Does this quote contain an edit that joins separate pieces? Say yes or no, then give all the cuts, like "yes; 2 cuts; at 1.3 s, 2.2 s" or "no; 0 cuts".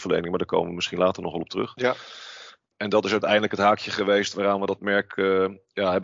yes; 1 cut; at 2.7 s